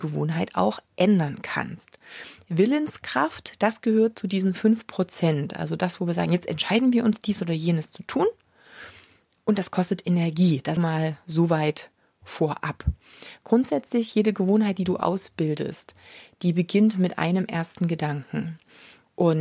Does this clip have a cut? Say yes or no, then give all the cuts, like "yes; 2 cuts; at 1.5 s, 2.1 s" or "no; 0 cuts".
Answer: yes; 1 cut; at 10.8 s